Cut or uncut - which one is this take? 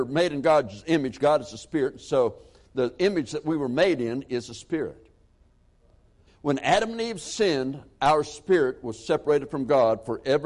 cut